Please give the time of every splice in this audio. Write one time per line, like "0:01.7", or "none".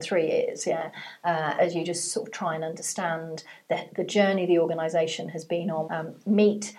0:01.6
0:05.8